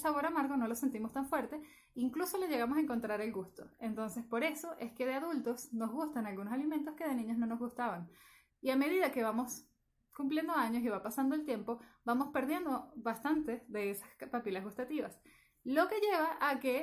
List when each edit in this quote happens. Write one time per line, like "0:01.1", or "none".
0:08.5